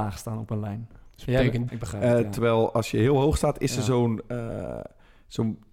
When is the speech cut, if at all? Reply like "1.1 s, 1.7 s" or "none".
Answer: 1.7 s